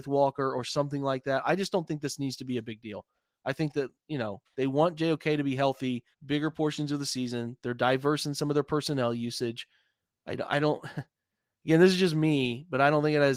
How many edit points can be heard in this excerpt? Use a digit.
1